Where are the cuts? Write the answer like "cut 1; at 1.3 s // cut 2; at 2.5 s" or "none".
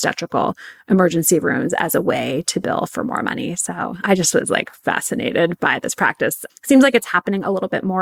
cut 1; at 4.0 s